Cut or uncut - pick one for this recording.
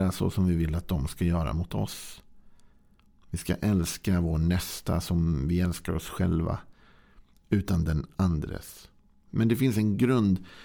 cut